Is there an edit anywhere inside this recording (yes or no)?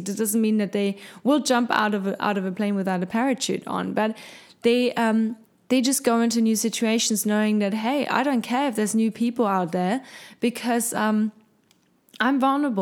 no